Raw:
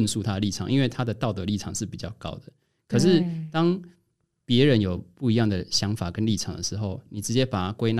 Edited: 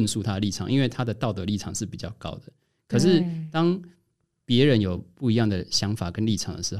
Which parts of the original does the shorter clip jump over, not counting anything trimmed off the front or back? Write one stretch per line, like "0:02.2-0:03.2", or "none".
none